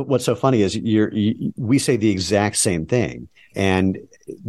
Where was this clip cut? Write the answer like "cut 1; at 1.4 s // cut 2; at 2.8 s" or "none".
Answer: cut 1; at 3.5 s